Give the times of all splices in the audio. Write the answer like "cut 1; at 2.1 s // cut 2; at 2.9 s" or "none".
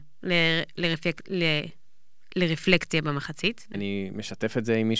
cut 1; at 3.7 s